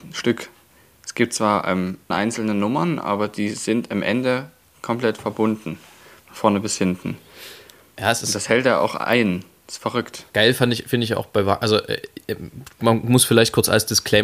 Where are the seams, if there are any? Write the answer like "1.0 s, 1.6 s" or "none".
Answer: 2.1 s

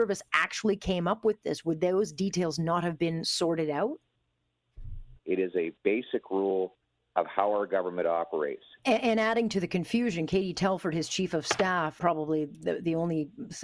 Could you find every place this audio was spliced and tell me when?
5.2 s, 8.8 s, 12.0 s

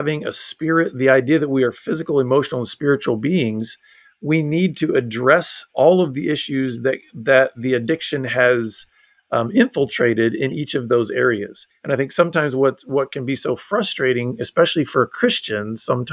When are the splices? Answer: none

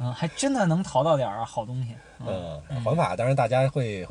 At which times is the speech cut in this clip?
2.7 s

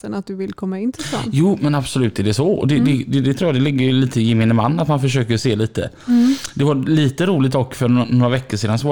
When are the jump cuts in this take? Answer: 5.4 s

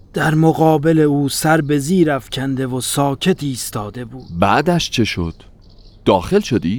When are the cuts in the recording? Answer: none

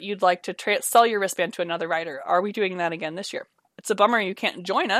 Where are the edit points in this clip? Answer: 3.6 s

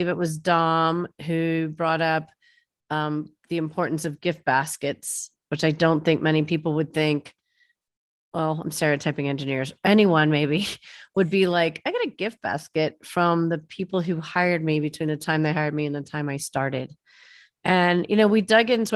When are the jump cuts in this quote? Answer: none

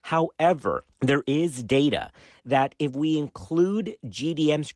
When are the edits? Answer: 0.9 s

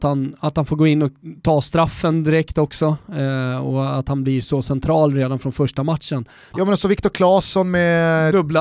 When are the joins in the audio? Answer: 6.5 s

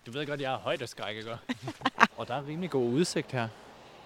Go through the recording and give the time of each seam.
2.1 s

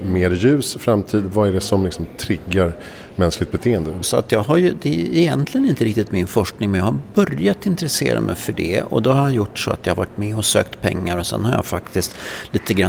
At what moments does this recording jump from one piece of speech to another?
4.0 s

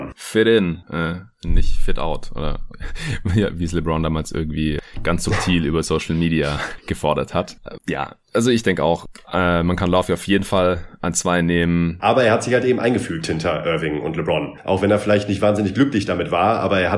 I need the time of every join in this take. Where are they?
12.0 s

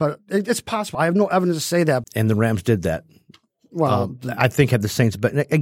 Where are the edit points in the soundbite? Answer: 0.9 s, 2.0 s

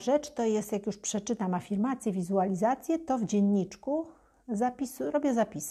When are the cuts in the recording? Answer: none

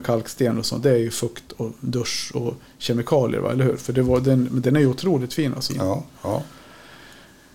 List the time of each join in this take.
3.8 s, 5.7 s

